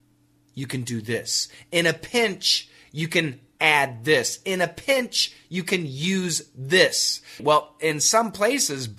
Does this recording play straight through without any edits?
no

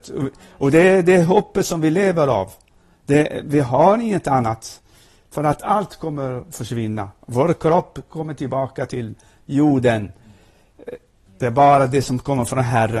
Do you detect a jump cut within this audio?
yes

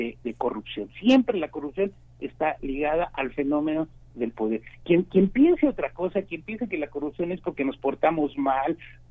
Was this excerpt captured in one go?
yes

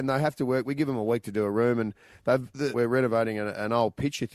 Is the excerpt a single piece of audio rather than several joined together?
no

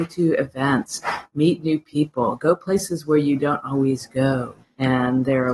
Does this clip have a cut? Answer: yes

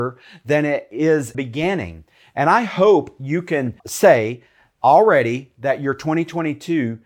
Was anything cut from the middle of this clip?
yes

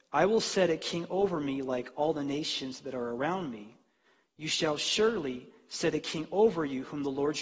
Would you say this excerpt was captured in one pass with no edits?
yes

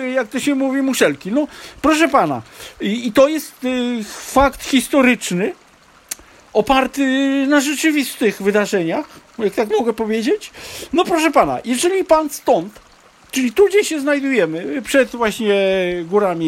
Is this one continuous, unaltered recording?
yes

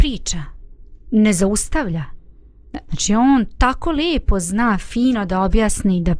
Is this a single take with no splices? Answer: no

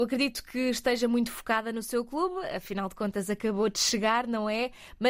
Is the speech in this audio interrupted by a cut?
no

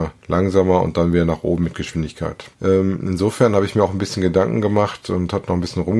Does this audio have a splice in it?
yes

